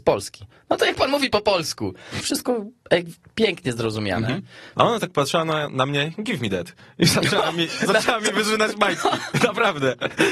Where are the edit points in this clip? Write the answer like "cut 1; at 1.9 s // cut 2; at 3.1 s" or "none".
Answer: cut 1; at 2.2 s // cut 2; at 4.7 s